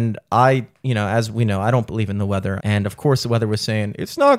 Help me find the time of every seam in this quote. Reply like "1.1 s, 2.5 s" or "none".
2.6 s